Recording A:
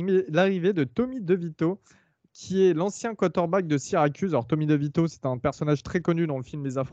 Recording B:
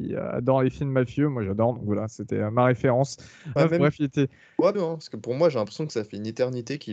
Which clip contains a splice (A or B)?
B